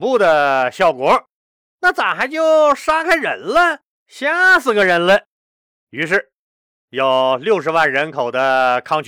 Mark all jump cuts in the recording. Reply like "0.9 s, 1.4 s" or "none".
1.7 s, 4.0 s